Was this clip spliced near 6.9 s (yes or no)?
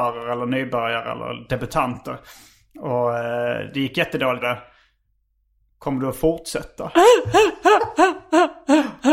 no